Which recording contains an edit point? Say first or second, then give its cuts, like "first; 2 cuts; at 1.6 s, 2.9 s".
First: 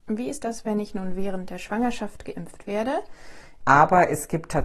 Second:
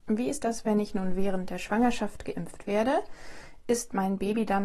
first; 1 cut; at 3.6 s